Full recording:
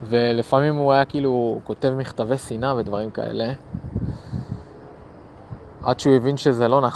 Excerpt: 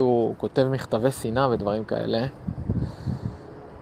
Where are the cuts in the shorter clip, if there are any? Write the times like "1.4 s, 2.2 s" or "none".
none